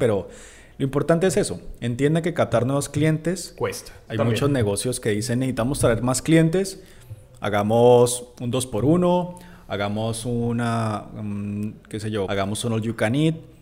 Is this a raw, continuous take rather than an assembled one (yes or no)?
no